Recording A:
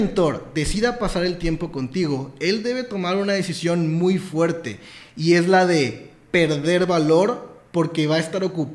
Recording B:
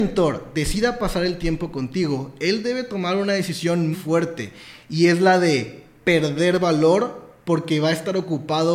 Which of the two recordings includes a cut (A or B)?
B